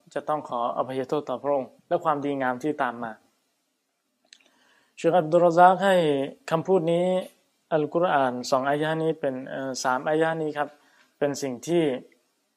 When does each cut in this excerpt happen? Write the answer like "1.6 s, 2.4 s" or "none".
1.8 s

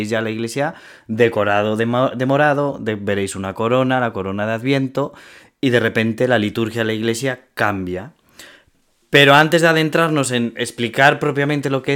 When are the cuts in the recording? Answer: none

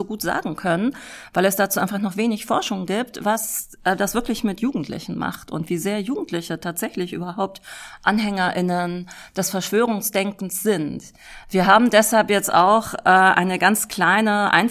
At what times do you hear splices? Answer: none

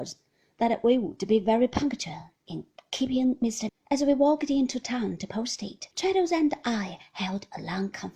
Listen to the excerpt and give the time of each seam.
3.7 s, 5.9 s

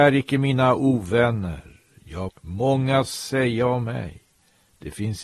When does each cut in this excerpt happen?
2.3 s

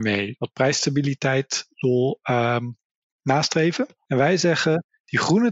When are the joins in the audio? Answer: 4.1 s

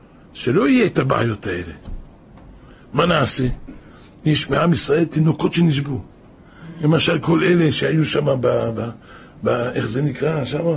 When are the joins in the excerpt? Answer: none

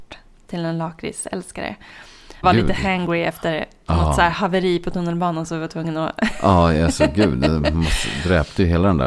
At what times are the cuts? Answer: 2.4 s

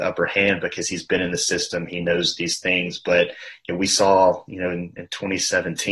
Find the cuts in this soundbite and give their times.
none

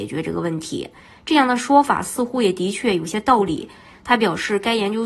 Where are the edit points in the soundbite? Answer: 1.1 s, 3.9 s

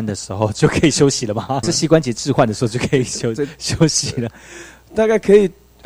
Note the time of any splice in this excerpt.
1.6 s, 4.3 s

